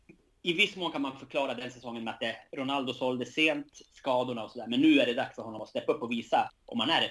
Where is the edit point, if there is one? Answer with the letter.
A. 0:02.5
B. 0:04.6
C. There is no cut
C